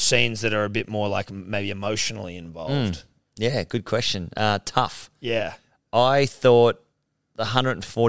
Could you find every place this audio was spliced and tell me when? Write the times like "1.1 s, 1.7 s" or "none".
none